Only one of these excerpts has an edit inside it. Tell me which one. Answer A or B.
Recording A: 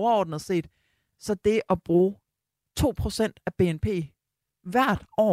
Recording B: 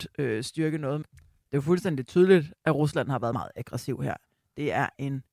B